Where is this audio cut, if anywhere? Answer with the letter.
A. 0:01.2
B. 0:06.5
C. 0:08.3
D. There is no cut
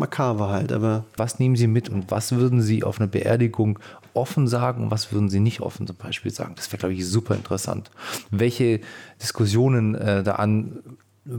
A